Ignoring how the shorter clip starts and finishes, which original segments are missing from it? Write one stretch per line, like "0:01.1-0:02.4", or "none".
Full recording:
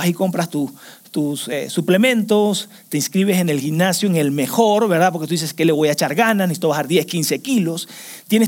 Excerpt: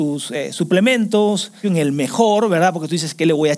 0:02.8-0:04.0

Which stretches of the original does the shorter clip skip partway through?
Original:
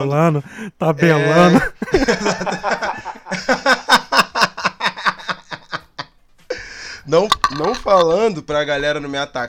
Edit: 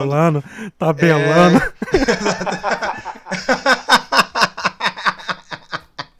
none

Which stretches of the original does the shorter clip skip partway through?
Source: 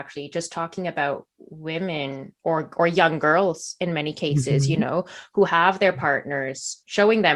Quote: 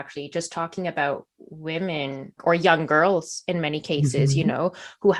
0:02.4-0:02.7

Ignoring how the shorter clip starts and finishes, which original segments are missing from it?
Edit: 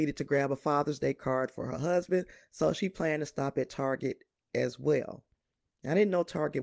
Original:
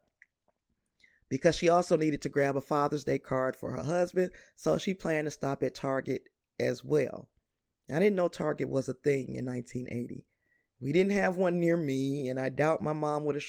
none

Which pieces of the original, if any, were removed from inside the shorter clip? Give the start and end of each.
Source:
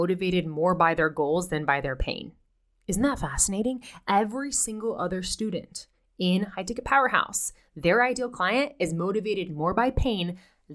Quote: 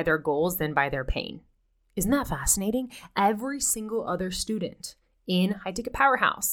none

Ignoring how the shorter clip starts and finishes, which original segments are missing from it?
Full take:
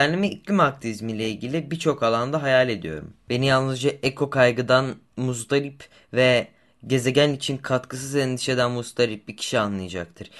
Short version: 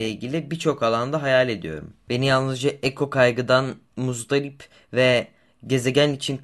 none

